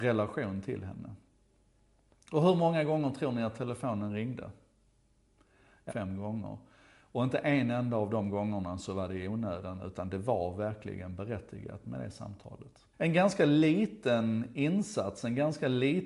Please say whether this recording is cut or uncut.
cut